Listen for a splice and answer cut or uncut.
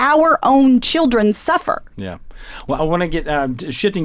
uncut